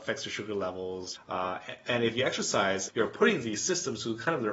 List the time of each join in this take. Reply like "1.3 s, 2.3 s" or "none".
1.2 s, 2.9 s

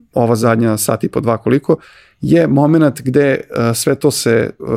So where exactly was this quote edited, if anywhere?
none

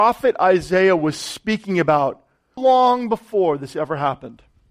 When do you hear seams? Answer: 2.6 s

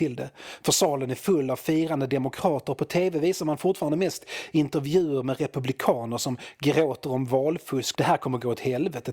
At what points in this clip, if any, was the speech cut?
8.0 s

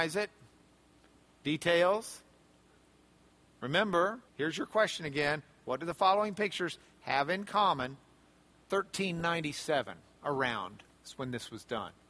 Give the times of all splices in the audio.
4.3 s, 8.5 s

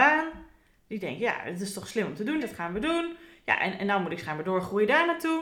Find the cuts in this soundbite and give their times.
2.4 s

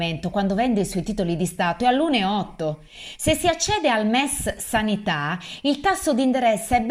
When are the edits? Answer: none

